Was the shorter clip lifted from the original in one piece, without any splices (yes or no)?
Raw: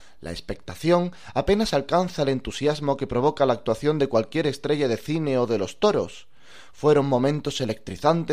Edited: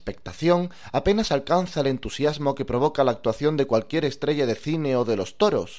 yes